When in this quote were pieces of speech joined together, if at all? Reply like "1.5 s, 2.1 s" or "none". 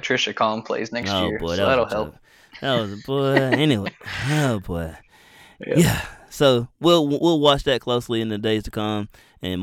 none